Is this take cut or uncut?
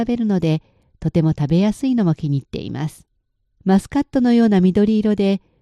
cut